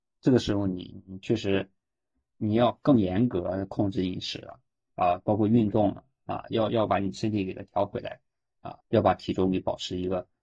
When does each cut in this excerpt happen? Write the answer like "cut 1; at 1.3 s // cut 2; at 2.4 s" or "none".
cut 1; at 8.8 s